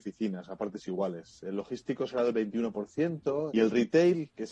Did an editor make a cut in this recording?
yes; 1 cut; at 3.5 s

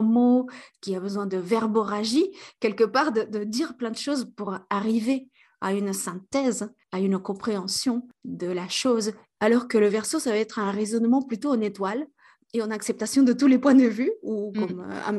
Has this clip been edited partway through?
yes; 1 cut; at 9.4 s

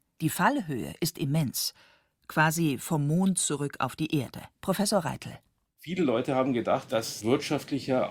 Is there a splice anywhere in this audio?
yes; 1 cut; at 4.5 s

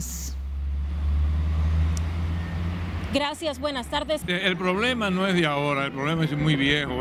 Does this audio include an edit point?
yes; 1 cut; at 4.2 s

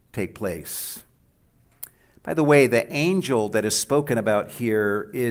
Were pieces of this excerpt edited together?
no; 0 cuts

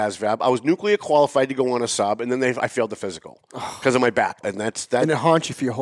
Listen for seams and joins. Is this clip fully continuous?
no; 1 cut; at 4.4 s

